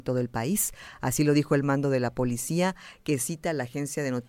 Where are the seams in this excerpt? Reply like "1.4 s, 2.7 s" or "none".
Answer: none